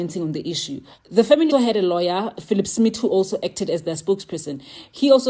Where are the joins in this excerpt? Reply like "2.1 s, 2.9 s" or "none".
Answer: 1.5 s